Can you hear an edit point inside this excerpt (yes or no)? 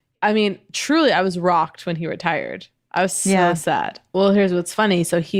yes